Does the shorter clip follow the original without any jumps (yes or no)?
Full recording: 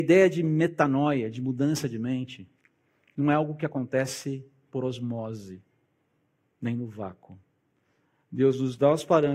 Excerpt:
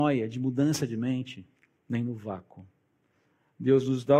no